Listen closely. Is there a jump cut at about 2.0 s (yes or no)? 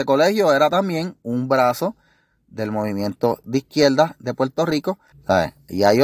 no